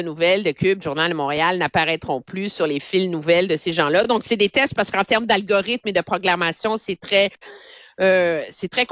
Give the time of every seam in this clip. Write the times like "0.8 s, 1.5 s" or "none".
none